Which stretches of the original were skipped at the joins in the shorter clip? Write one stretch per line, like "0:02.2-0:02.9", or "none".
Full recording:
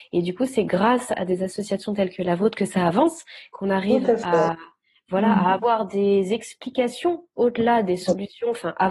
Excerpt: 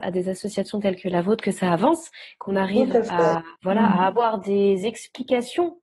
0:04.7-0:05.0